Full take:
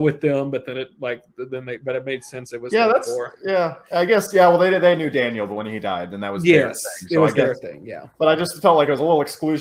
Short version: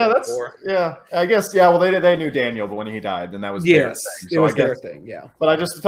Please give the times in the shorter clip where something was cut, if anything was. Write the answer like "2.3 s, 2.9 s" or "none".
none